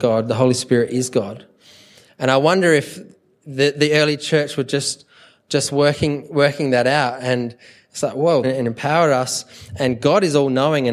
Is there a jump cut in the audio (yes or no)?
yes